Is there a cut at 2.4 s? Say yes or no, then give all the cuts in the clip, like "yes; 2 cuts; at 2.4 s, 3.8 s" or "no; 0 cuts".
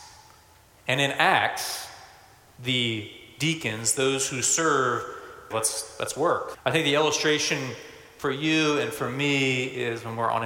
no; 2 cuts; at 5.5 s, 6.5 s